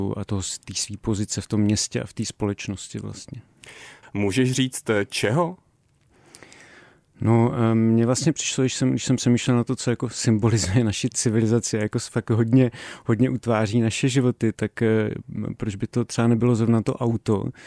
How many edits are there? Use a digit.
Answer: 2